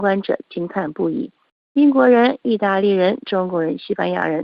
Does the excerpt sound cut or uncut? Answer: uncut